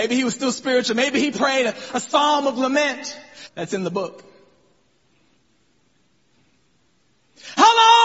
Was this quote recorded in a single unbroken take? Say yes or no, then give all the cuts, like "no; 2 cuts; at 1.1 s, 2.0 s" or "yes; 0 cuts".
no; 1 cut; at 3.5 s